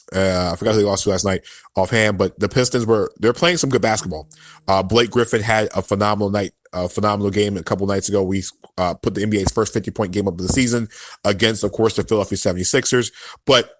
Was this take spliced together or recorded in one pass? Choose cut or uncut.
uncut